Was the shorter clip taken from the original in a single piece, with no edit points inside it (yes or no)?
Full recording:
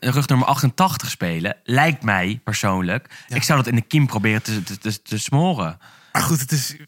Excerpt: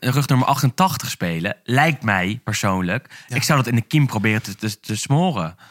no